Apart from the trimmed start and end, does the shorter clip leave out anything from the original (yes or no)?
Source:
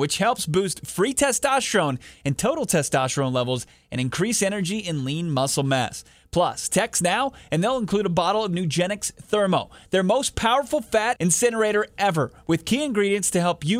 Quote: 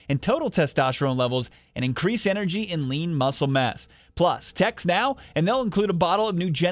no